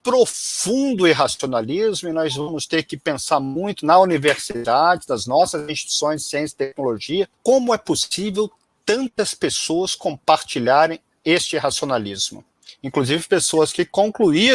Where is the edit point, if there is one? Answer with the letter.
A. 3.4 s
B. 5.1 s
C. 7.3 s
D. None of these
C